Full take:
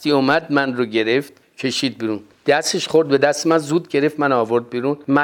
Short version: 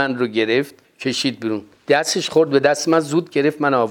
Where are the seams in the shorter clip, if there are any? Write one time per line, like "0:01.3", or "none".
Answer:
none